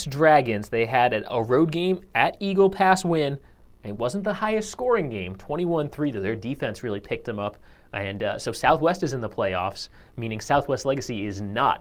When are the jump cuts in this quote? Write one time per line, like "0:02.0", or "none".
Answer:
none